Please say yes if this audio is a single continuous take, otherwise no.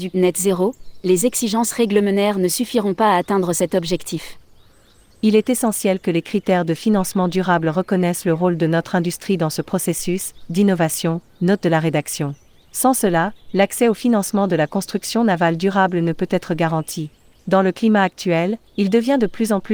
yes